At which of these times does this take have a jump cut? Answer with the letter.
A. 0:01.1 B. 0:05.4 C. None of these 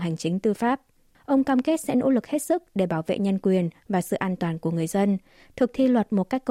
A